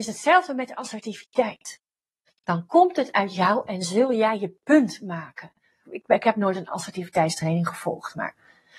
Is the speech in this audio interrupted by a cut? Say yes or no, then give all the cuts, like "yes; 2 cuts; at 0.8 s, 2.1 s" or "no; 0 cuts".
yes; 2 cuts; at 2.3 s, 5.8 s